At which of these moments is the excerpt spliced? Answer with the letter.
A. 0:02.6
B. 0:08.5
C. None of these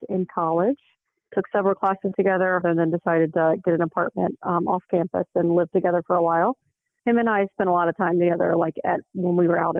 A